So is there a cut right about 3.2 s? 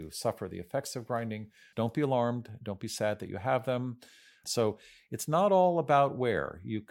no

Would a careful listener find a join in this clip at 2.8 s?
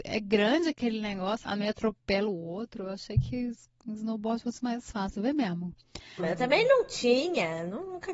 no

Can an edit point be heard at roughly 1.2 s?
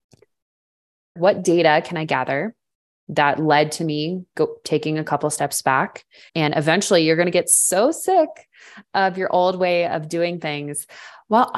yes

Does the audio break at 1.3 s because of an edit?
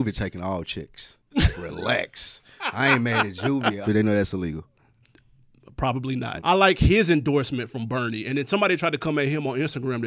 no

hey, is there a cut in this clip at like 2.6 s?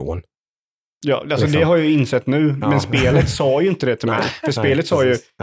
no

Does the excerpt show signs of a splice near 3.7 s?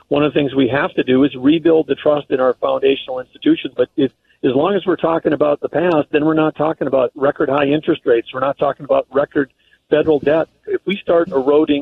yes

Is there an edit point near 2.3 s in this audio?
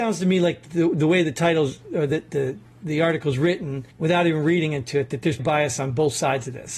no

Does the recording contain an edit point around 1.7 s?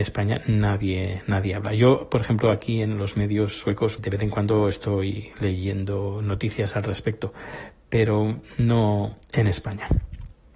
no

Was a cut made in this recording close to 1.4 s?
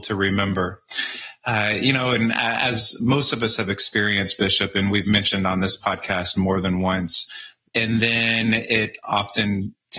no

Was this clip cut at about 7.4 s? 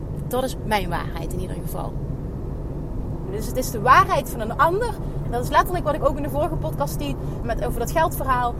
yes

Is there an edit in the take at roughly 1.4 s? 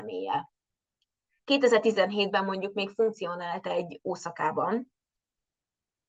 yes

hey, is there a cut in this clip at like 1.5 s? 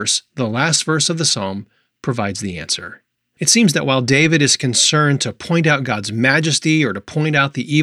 no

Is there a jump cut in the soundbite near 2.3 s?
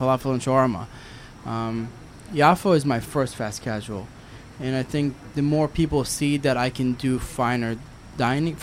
no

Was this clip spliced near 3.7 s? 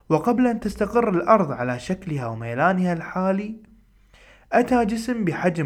no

